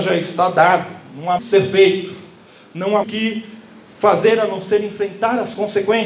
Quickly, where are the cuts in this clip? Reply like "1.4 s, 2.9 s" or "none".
1.4 s, 3.0 s